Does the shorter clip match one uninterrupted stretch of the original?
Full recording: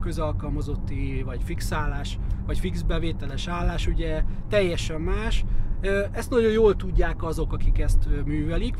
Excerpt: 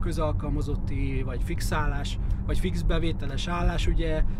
yes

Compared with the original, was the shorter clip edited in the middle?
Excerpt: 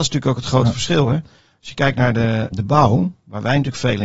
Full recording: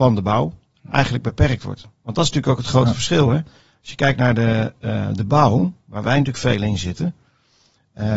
yes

